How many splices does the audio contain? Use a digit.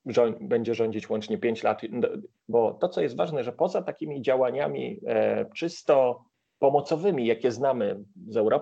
1